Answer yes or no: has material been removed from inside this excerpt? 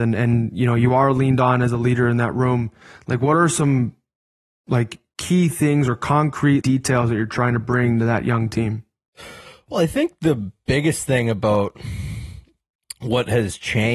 yes